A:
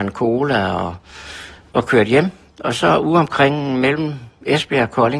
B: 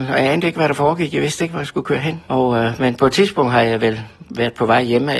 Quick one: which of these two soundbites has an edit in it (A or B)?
B